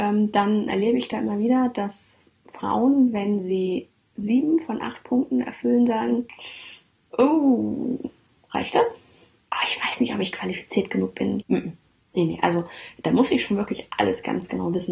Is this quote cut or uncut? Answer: cut